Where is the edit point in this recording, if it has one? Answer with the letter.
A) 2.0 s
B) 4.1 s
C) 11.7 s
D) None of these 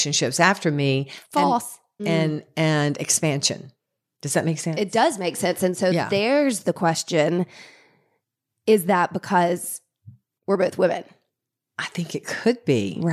A